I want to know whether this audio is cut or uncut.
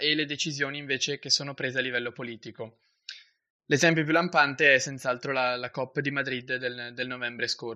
uncut